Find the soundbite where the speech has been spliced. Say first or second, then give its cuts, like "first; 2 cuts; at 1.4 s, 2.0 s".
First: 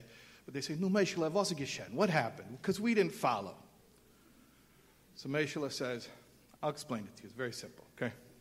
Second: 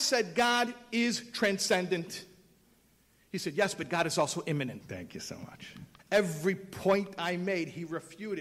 second; 2 cuts; at 4.8 s, 6.0 s